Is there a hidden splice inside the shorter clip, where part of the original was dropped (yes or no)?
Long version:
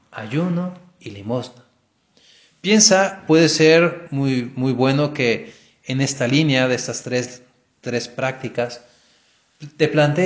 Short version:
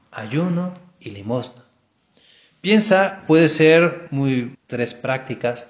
yes